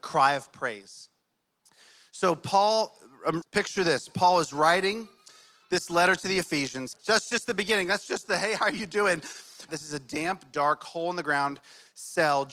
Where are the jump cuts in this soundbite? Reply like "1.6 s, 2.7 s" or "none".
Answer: 3.4 s, 6.9 s, 9.7 s

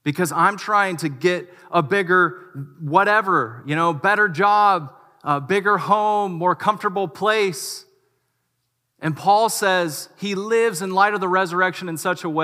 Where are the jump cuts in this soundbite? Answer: none

